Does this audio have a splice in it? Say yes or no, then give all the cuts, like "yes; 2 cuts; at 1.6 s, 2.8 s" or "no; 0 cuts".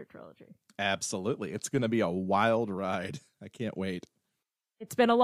no; 0 cuts